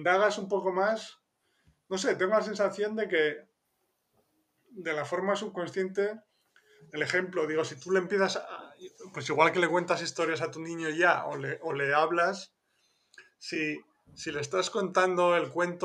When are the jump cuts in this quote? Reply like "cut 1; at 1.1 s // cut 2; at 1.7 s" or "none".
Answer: none